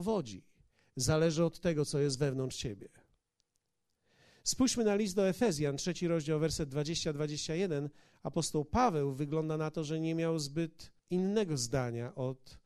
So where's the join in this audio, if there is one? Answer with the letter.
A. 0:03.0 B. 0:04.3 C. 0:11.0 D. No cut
C